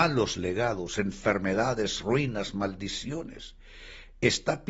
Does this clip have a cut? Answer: no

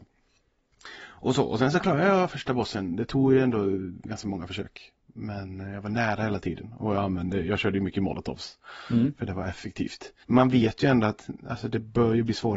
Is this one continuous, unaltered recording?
no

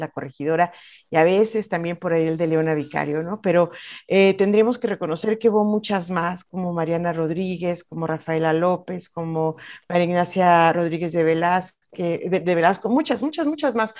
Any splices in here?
no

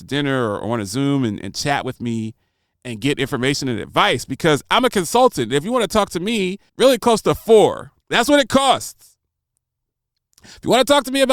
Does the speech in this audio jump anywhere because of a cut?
yes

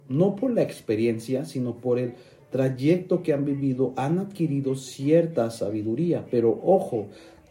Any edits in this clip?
no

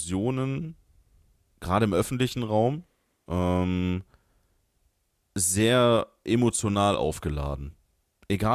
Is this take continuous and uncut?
yes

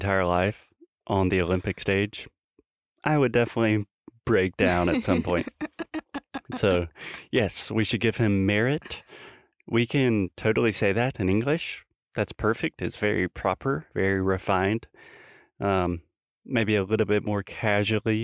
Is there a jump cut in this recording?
no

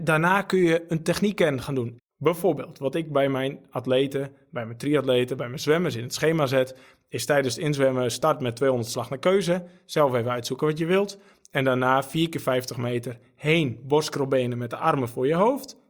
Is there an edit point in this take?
yes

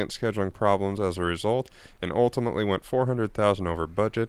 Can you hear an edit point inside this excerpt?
no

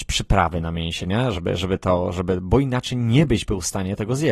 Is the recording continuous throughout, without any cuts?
yes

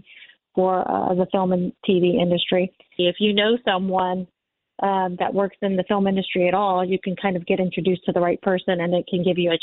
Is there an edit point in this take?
yes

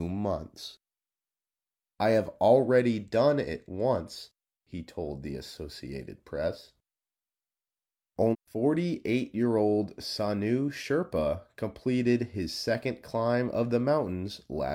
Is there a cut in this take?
yes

